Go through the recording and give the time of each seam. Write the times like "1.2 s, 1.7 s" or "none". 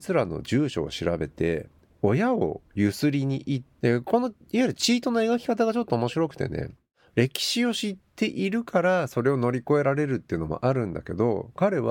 3.8 s